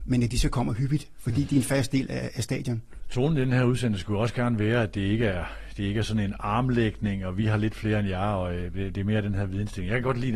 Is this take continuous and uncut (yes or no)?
yes